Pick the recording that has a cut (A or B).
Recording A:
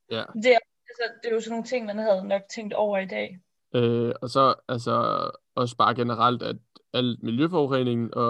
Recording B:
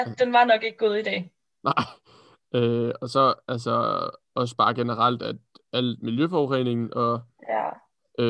A